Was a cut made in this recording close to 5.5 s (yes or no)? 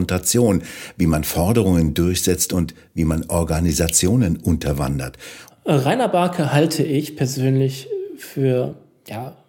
yes